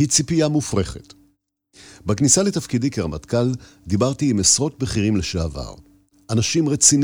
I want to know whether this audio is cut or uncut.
uncut